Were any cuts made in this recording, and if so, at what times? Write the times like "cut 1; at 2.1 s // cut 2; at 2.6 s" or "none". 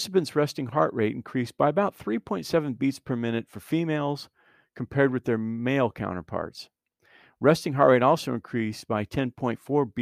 none